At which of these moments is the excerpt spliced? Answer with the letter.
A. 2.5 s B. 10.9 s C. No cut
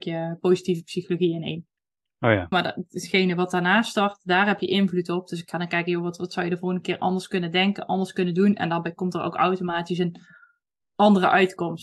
A